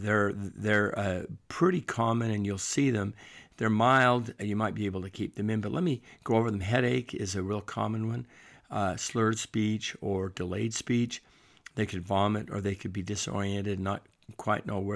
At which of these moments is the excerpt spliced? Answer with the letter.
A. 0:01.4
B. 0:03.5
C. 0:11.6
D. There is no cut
D